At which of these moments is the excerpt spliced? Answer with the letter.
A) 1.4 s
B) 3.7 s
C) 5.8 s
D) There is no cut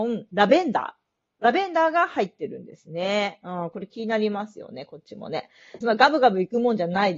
C